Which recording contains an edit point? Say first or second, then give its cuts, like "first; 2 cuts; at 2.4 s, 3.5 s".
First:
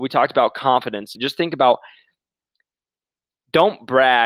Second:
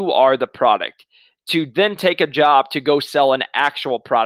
first; 1 cut; at 1.1 s